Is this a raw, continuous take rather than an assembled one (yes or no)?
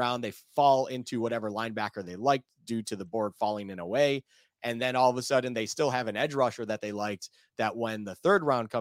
yes